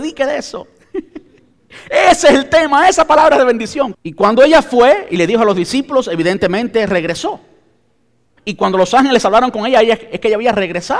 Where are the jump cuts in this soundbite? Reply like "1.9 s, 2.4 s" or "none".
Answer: 3.9 s, 8.4 s